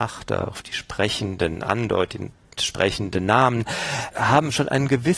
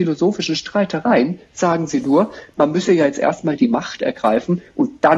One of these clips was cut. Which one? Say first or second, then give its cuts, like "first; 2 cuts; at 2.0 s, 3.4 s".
first; 1 cut; at 4.1 s